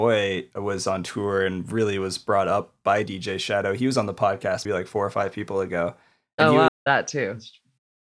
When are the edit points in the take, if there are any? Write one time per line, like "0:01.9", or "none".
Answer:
0:04.7
0:06.7